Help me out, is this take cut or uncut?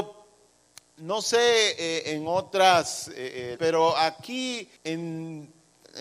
cut